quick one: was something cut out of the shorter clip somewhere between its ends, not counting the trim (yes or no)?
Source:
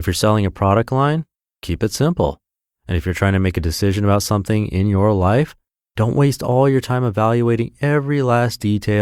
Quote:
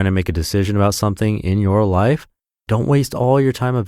no